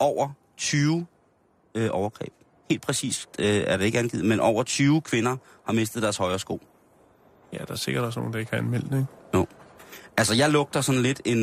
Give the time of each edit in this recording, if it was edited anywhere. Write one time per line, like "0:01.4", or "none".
none

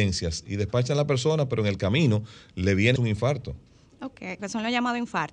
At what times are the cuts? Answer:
0:03.0
0:04.4

